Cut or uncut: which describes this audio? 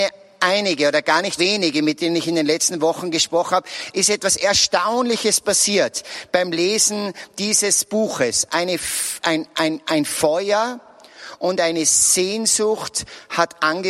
cut